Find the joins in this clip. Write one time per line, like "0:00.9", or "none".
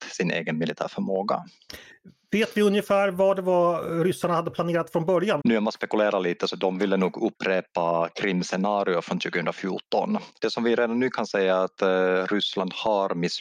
0:05.4
0:10.4